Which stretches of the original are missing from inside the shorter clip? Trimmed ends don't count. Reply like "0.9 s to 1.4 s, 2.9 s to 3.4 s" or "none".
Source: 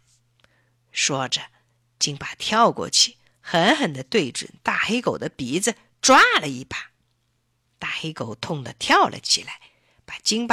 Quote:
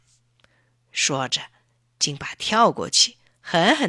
none

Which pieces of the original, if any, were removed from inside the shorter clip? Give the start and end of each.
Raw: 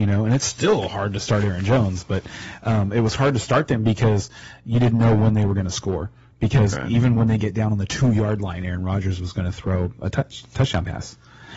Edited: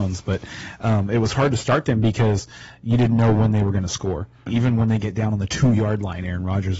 6.3 s to 6.9 s

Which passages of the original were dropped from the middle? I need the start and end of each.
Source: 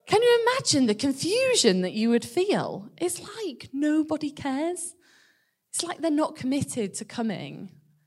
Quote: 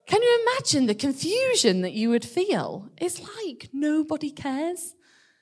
none

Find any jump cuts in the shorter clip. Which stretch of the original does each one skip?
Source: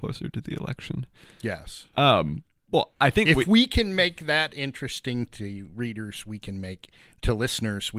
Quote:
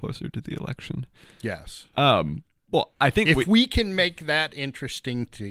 none

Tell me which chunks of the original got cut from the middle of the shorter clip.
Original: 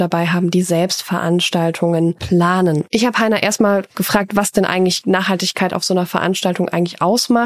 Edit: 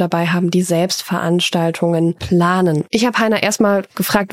none

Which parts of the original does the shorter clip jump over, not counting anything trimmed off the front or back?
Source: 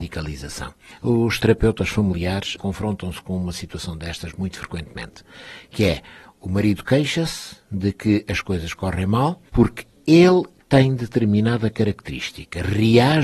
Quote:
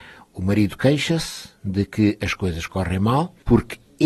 none

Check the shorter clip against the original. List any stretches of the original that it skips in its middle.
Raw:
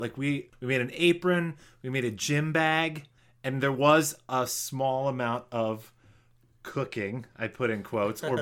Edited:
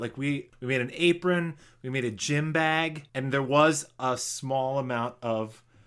3.1 s to 3.4 s

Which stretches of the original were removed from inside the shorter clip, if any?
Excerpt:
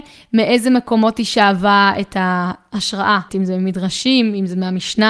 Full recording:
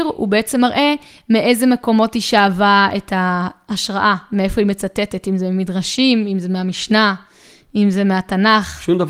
4.2 s to 5.2 s

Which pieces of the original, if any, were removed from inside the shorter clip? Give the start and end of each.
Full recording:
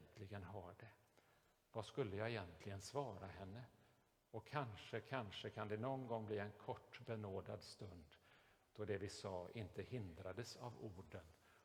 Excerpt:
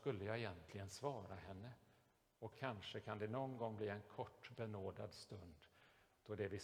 4.4 s to 5.0 s

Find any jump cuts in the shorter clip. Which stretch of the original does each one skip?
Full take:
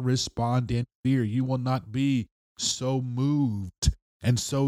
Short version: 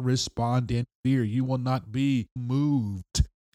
2.4 s to 3.0 s

